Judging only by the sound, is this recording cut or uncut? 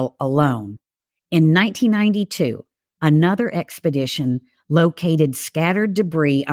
cut